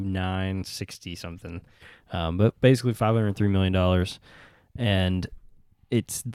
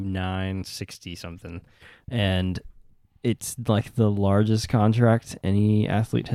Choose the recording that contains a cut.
second; 1 cut; at 2.0 s

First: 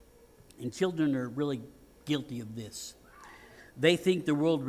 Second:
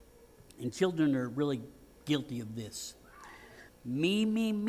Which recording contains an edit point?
second; 1 cut; at 3.7 s

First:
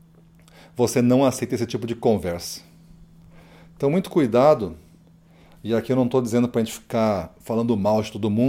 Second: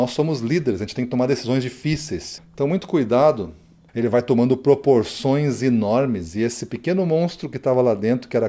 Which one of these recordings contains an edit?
second; 2 cuts; at 2.4 s, 3.9 s

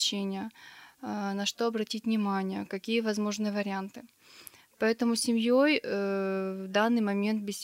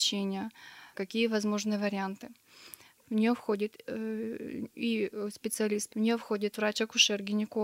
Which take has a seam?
second; 3 cuts; at 0.9 s, 3.0 s, 5.9 s

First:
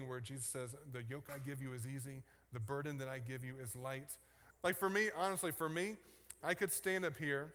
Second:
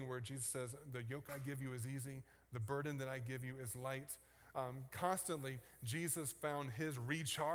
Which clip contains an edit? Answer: first; 2 cuts; at 4.5 s, 6.4 s

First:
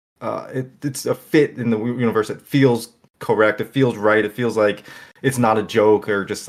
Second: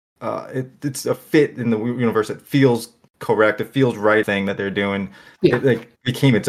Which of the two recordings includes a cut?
second; 1 cut; at 4.2 s

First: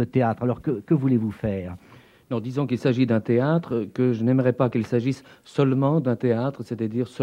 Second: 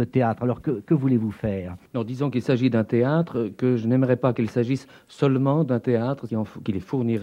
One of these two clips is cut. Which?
second; 2 cuts; at 1.9 s, 6.3 s

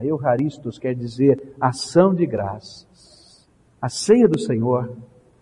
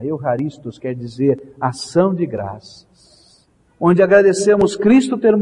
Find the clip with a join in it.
second; 1 cut; at 3.7 s

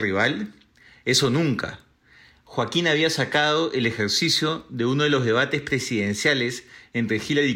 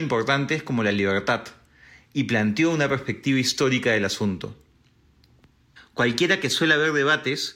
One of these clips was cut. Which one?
second; 1 cut; at 5.8 s

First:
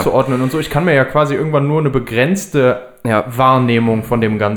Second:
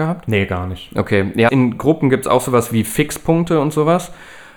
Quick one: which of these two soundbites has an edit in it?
second; 1 cut; at 1.5 s

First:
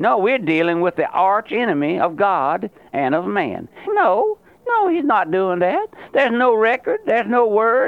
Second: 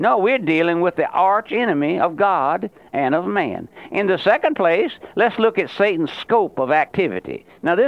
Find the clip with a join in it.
first; 1 cut; at 3.9 s

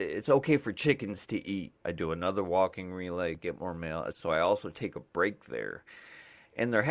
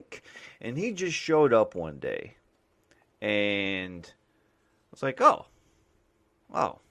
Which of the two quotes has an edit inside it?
first; 2 cuts; at 1.8 s, 4.1 s

